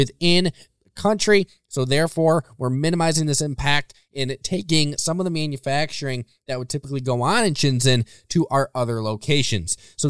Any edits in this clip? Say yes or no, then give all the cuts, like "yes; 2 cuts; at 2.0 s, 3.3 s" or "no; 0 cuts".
no; 0 cuts